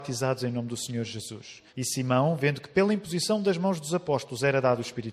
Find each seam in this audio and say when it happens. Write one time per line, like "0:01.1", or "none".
0:01.7